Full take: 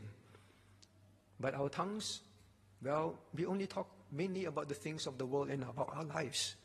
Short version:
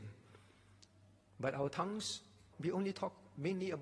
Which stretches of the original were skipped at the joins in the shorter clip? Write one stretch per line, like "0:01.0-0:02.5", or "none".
0:02.5-0:03.3